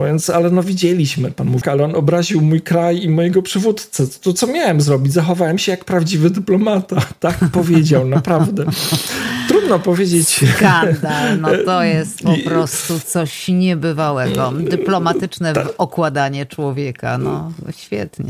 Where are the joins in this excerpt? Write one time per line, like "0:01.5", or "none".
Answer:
0:01.6